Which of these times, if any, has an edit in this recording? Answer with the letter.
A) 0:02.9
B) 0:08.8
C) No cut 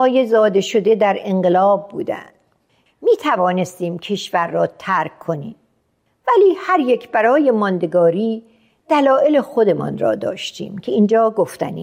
A